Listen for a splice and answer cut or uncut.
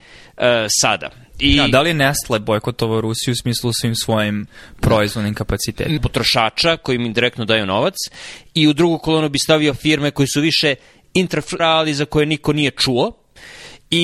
cut